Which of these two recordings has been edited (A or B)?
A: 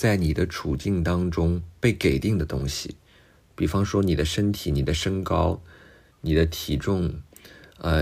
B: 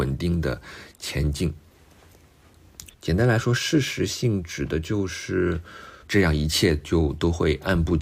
B